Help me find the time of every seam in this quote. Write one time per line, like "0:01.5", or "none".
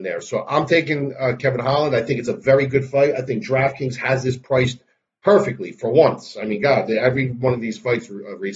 none